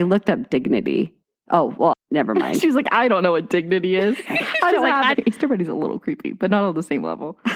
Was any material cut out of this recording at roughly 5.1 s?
yes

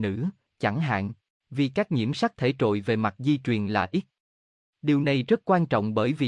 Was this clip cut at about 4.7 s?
no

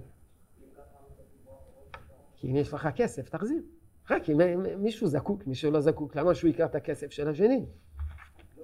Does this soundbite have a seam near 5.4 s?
no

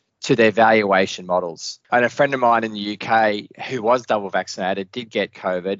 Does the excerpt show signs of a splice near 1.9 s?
yes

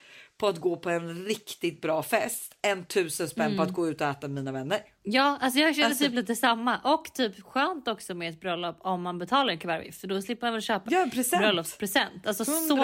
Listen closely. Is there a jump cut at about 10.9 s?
yes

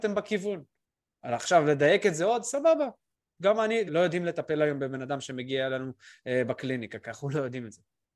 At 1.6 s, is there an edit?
no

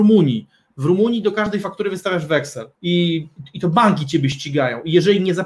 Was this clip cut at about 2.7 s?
yes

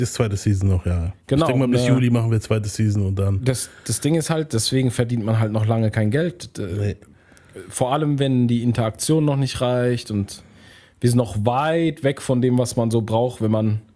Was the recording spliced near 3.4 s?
no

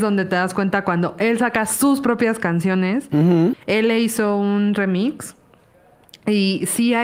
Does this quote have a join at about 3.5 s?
yes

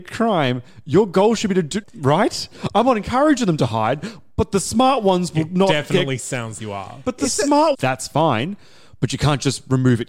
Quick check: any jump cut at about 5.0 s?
no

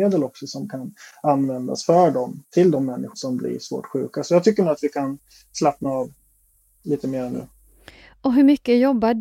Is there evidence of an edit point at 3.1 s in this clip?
yes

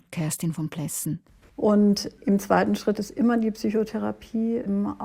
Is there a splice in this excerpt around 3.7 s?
no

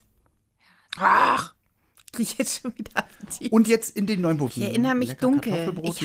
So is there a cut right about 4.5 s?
yes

